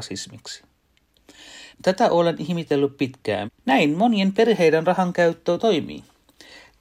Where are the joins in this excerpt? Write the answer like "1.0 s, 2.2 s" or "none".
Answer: 1.7 s, 3.5 s

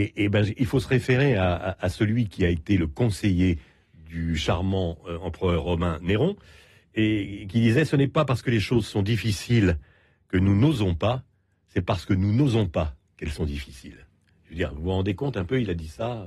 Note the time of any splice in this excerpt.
none

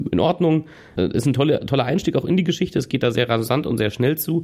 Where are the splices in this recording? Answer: 0.9 s

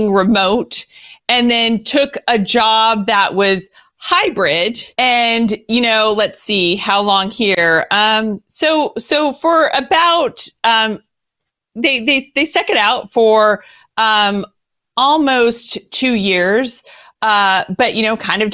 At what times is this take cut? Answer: 4.9 s

